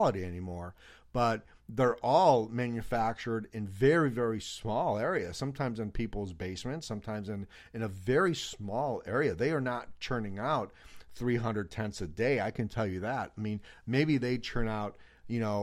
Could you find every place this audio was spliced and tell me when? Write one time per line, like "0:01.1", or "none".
none